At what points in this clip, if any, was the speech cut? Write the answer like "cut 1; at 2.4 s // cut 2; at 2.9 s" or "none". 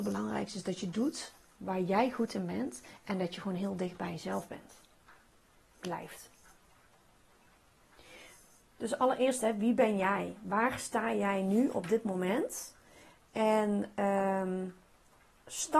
none